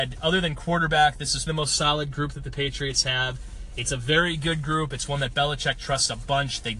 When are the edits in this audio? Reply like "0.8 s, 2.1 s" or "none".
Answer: 1.5 s

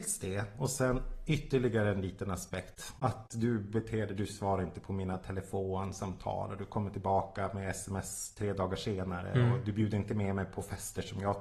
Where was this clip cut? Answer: 3.0 s

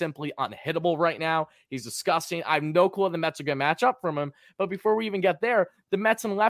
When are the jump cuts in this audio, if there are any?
none

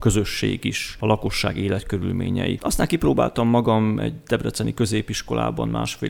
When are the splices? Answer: 2.6 s

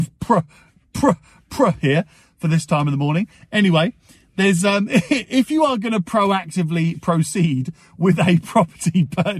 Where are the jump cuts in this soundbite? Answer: none

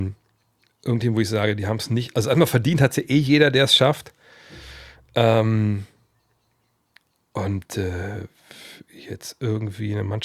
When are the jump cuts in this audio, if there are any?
none

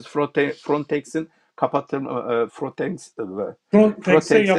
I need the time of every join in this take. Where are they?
2.5 s

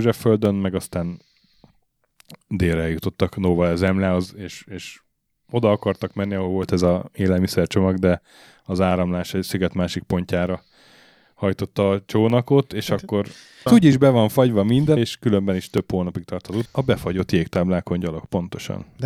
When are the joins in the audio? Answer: 13.7 s, 15.0 s, 16.7 s

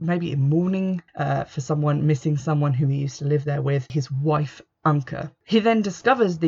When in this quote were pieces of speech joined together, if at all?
1.1 s

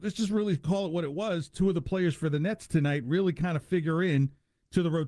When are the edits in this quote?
none

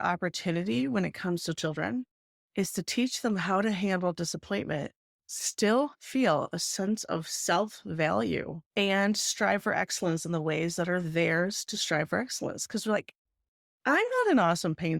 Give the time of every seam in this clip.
8.7 s

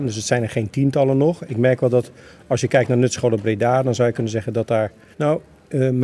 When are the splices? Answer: 5.1 s

